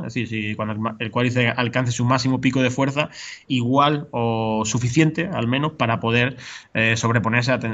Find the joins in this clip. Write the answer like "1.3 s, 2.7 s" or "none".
3.5 s